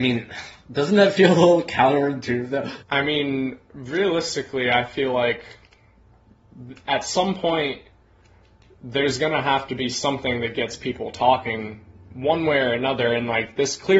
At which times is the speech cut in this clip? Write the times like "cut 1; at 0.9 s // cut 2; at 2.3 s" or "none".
cut 1; at 2.8 s